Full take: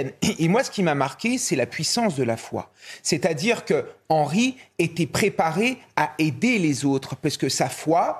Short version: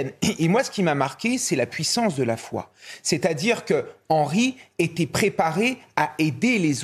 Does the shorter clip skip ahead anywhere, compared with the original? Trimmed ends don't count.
no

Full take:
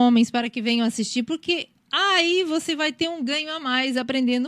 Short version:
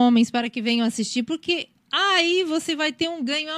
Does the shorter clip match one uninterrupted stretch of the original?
yes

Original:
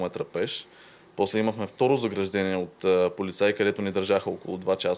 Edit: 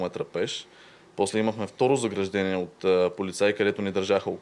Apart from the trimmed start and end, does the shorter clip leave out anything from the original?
no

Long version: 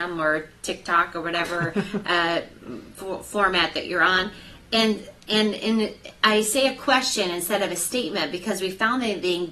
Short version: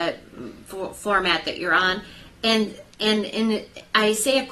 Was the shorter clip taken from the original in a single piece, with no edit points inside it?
yes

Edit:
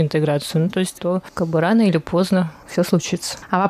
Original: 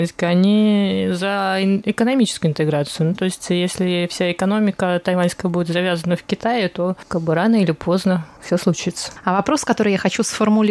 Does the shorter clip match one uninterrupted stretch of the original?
no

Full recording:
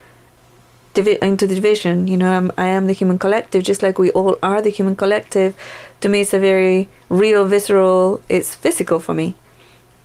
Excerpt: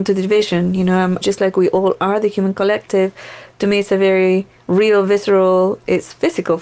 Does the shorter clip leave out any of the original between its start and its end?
yes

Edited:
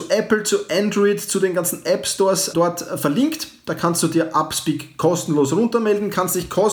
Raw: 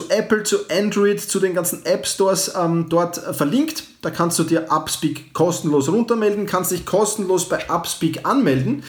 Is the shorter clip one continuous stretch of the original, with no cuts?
no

